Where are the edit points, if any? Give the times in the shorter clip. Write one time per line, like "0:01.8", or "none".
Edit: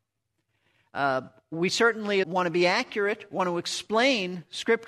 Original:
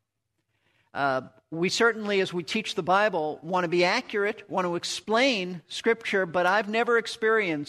0:02.2